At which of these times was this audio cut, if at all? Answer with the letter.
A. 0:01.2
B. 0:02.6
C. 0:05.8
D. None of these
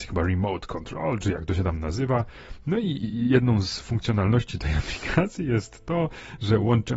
D